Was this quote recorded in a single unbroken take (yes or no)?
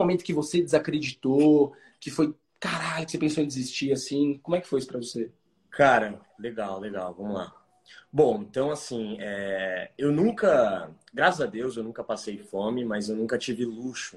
yes